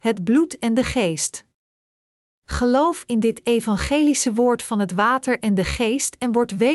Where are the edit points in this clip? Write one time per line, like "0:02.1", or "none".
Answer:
none